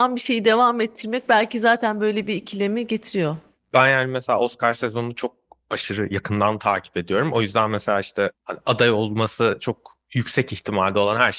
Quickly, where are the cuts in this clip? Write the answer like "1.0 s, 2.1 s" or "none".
none